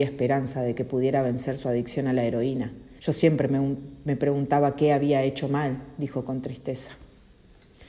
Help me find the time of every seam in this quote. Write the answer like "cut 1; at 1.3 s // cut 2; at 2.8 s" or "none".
cut 1; at 3.0 s